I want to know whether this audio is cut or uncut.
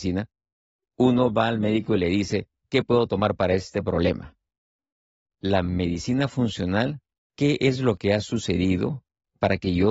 cut